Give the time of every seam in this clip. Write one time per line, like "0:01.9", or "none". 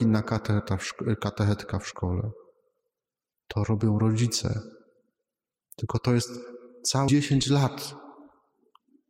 0:05.6
0:07.1